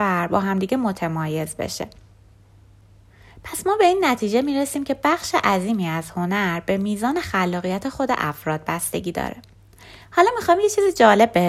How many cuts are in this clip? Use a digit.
0